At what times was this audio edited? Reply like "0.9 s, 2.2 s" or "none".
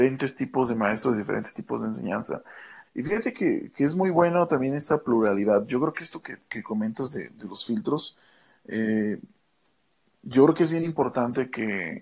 2.9 s

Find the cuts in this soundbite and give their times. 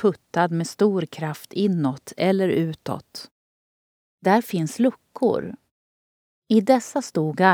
4.0 s

